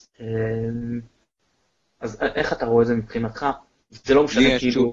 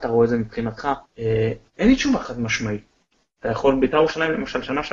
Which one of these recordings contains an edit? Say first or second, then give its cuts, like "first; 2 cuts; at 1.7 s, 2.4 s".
second; 1 cut; at 1.1 s